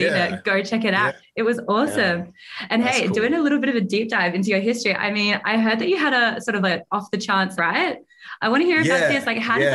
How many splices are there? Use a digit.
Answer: 2